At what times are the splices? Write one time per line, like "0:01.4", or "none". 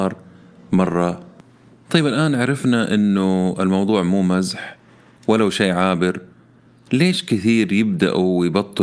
none